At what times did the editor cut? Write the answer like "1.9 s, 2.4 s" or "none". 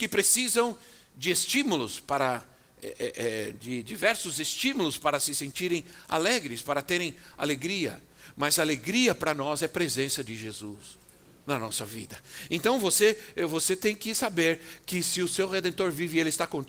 none

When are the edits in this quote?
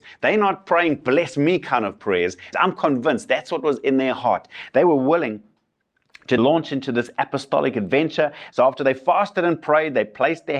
2.5 s, 6.4 s, 8.5 s

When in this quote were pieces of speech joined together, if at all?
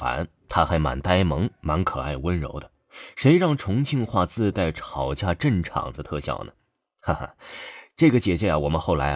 none

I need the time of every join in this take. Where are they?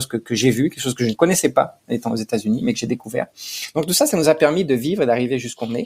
none

